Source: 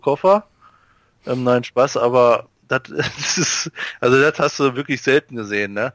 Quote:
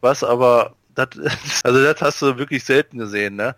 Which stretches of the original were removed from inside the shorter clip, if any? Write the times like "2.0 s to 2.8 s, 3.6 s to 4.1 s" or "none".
3.3 s to 4.0 s